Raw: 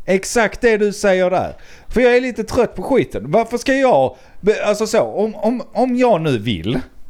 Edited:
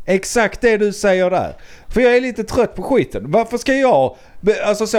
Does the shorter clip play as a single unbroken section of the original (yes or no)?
yes